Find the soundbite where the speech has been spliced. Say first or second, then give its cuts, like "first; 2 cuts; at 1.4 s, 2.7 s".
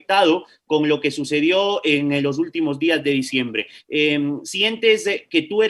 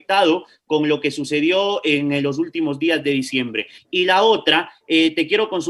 first; 1 cut; at 3.8 s